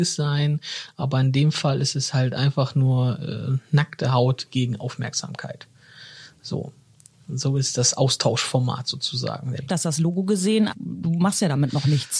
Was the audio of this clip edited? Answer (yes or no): yes